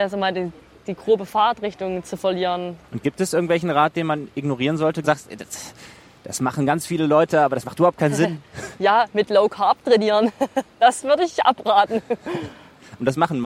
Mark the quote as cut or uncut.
cut